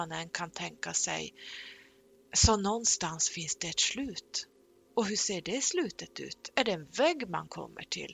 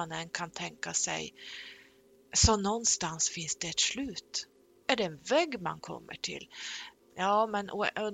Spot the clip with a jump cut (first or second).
second